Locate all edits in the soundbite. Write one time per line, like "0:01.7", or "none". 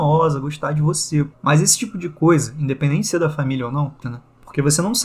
0:01.3
0:04.0

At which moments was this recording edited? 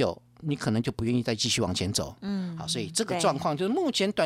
none

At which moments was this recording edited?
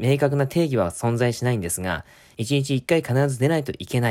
none

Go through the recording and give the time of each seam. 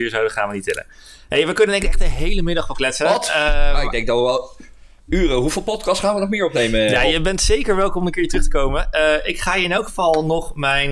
none

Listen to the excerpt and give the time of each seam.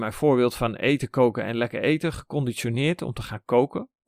none

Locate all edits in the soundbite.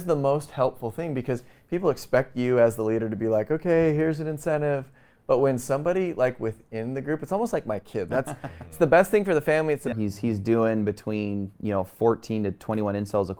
0:08.1
0:09.9

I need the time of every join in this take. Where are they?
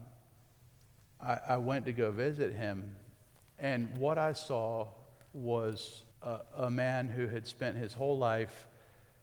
0:06.1

